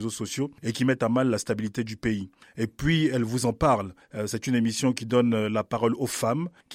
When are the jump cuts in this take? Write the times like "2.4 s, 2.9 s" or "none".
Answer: none

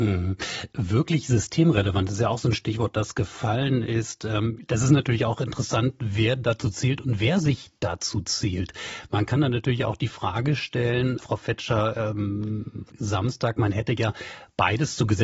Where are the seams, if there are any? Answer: 11.2 s, 12.9 s

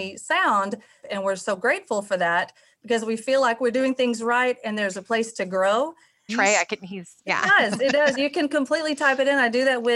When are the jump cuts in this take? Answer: 1.0 s, 6.3 s

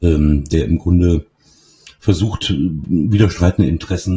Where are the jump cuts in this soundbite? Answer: none

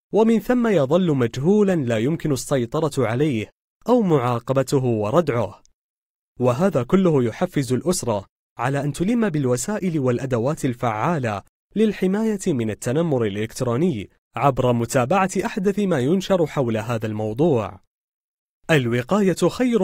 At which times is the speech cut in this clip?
none

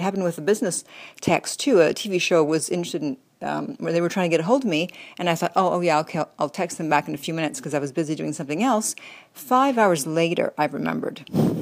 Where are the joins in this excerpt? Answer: none

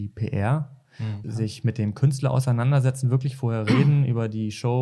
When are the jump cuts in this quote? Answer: 1.2 s

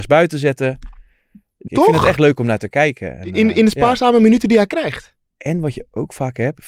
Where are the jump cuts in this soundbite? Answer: 1.7 s

